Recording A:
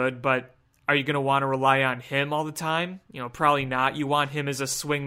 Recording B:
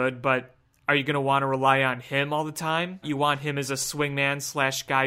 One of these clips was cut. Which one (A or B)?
B